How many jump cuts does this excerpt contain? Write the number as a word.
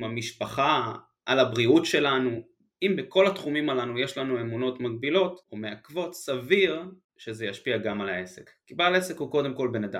two